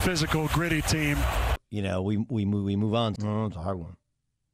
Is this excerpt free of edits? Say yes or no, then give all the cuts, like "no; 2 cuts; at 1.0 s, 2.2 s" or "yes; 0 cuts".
no; 2 cuts; at 1.6 s, 3.2 s